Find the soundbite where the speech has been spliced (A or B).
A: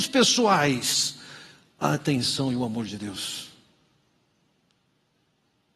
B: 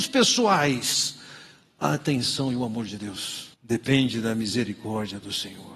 B